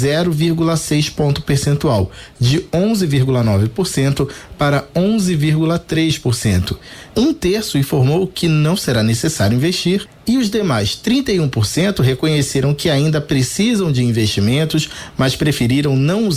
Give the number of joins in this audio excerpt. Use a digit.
1